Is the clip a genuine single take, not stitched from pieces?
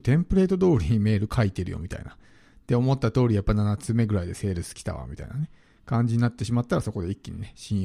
yes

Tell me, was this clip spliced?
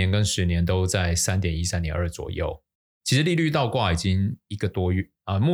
no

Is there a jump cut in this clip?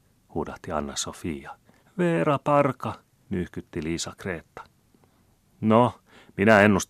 yes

